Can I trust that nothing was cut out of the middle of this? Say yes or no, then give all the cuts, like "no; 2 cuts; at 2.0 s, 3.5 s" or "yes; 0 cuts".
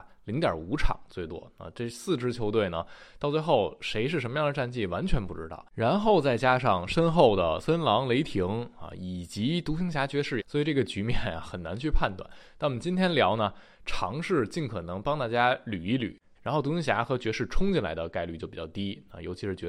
no; 2 cuts; at 10.4 s, 16.3 s